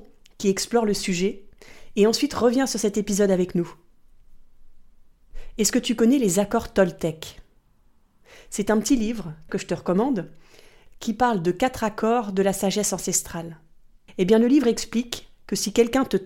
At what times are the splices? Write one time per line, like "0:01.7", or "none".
0:09.5
0:14.1